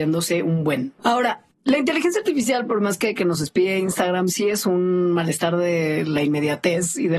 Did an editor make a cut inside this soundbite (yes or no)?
yes